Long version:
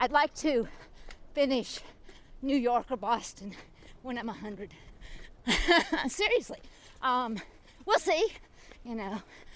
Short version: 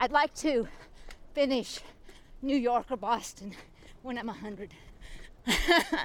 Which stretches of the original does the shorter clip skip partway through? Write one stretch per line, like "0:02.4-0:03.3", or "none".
none